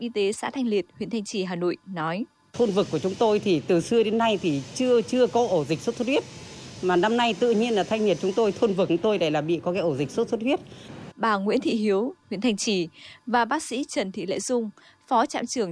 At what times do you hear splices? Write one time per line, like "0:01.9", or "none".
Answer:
0:11.1
0:12.2